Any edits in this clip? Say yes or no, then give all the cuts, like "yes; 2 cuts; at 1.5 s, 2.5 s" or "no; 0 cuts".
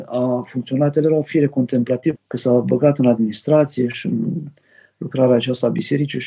yes; 1 cut; at 2.2 s